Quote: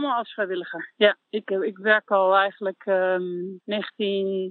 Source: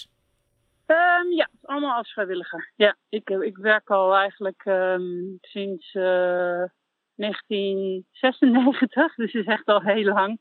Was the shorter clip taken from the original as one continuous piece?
no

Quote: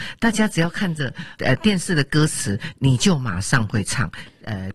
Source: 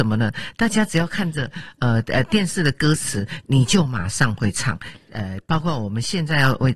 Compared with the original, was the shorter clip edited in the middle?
yes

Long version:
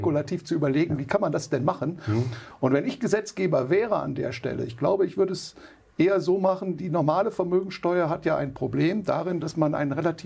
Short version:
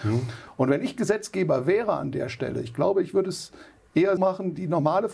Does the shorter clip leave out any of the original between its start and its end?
yes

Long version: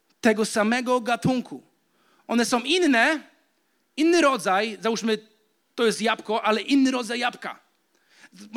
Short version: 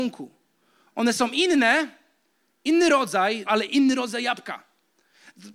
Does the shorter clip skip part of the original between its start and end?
yes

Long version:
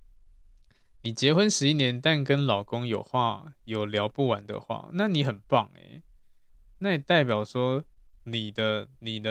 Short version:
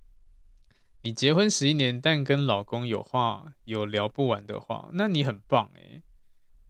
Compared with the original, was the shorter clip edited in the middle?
no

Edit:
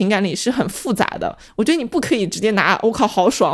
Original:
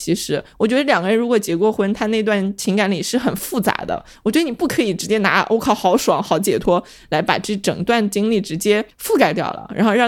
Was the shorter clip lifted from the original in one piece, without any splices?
yes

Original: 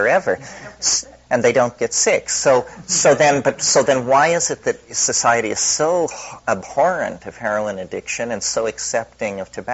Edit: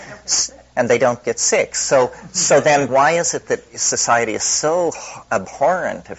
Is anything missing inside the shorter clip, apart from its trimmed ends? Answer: yes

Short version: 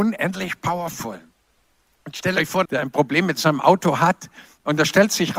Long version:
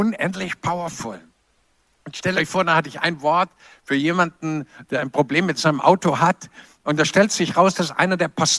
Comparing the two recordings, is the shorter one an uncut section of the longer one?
no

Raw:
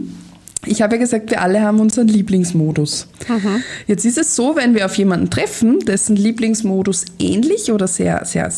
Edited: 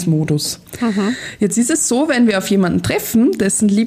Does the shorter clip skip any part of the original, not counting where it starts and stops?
no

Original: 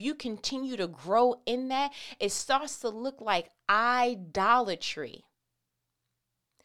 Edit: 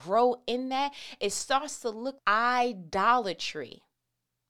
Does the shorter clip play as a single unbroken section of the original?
no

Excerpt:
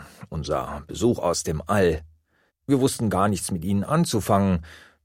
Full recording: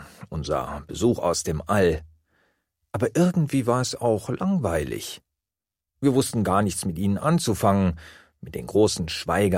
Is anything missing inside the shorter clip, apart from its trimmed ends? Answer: yes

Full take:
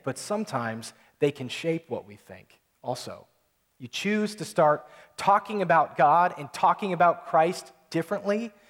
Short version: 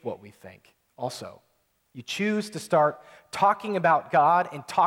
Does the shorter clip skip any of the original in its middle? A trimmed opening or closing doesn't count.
no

